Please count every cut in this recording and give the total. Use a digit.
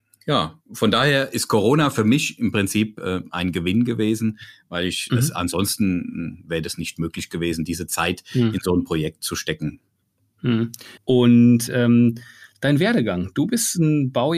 1